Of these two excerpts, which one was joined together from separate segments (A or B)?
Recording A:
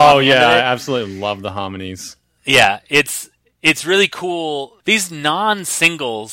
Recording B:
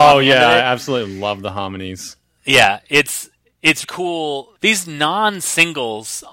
B